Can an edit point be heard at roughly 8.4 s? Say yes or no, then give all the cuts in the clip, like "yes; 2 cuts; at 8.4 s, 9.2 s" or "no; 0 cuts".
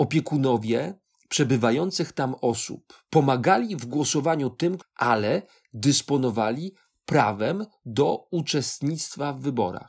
no; 2 cuts; at 3.1 s, 4.8 s